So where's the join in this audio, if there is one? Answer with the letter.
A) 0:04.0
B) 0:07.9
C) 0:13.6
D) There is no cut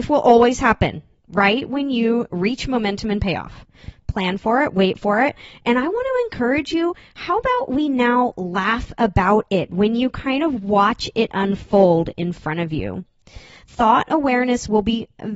D